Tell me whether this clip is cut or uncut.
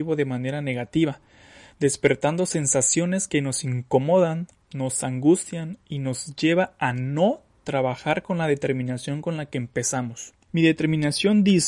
uncut